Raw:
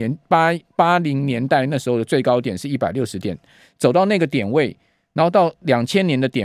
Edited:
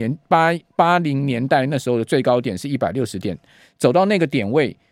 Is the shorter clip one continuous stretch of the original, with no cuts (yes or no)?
yes